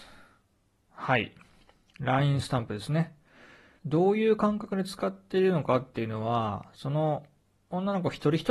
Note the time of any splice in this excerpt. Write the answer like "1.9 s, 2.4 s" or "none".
3.8 s